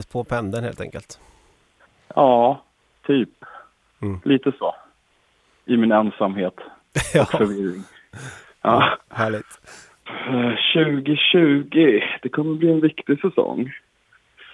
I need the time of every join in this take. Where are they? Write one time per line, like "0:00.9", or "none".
none